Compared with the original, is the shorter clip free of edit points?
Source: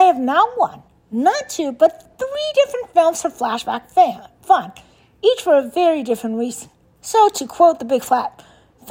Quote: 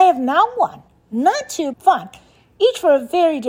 no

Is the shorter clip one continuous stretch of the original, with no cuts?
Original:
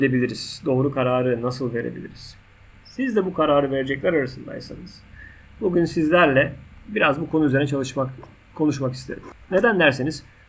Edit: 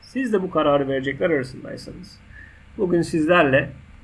yes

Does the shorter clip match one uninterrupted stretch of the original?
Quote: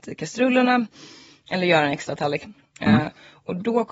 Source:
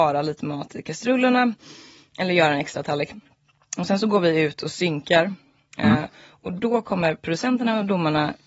no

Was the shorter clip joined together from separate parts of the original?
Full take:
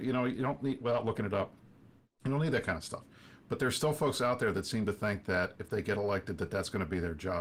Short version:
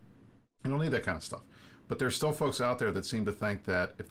no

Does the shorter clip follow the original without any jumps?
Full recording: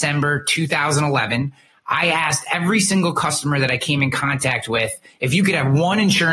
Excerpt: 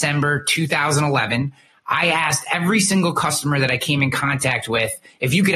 yes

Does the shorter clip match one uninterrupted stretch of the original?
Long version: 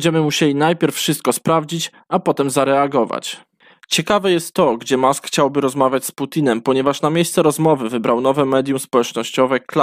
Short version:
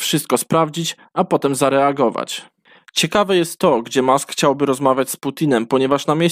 yes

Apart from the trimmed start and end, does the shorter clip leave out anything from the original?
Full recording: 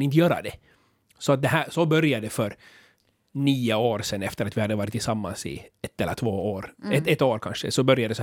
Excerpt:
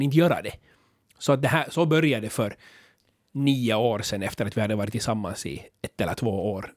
no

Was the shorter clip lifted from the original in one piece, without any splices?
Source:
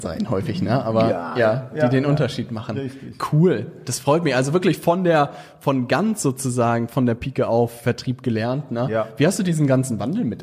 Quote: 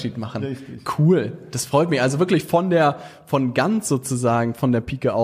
yes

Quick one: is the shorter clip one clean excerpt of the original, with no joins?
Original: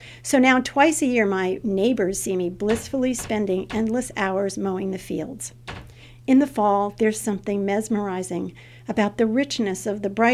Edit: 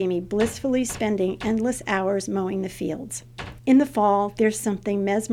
no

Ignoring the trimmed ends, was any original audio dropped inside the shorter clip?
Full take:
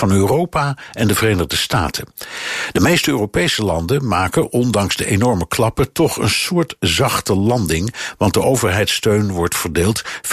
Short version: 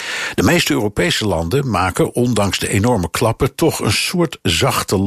no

